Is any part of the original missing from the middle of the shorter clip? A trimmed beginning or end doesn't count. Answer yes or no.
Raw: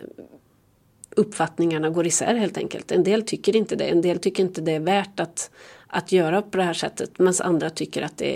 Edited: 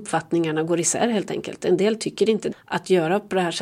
yes